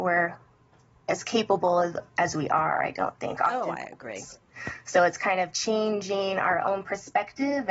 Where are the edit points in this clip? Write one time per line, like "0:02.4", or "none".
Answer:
none

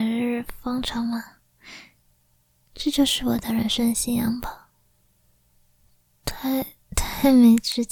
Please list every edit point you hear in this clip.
0:02.6

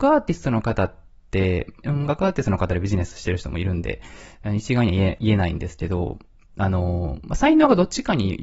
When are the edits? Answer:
0:01.8

